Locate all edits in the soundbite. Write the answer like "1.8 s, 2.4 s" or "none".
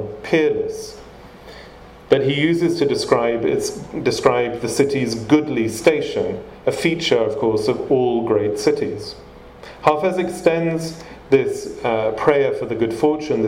none